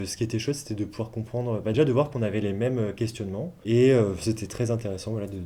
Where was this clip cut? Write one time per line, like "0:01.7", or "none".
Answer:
0:01.7

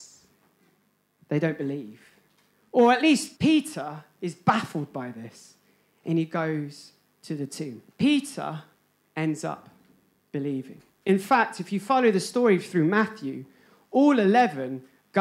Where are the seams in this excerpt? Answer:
0:03.4
0:07.9

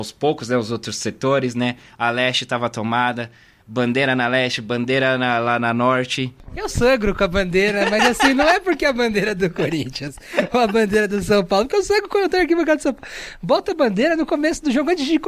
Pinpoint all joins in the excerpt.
none

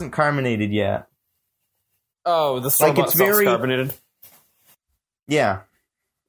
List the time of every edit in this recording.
none

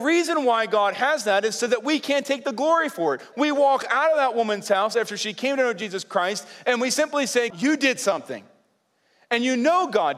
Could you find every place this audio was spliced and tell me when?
0:03.3
0:07.5

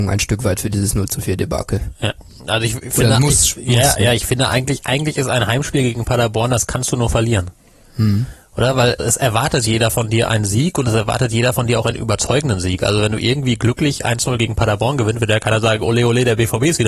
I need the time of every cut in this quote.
0:09.0

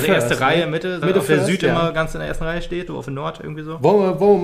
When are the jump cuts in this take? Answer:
0:01.0
0:02.9

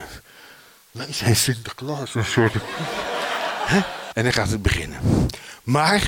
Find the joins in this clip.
0:04.1

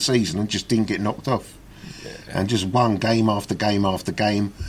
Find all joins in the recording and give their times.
none

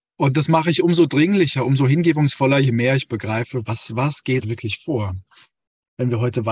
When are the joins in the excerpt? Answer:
0:04.4

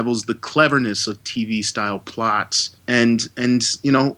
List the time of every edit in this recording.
0:02.8

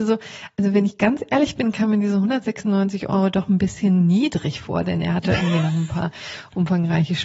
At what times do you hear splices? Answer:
none

